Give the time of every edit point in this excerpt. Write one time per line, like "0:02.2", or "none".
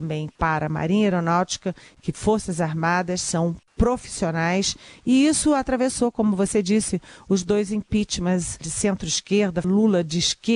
0:08.6
0:09.6